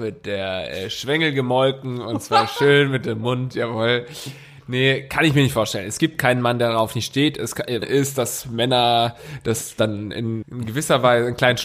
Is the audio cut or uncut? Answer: cut